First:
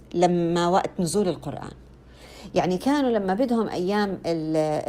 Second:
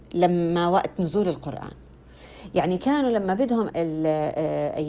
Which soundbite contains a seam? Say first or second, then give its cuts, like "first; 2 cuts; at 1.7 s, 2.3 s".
second; 1 cut; at 3.7 s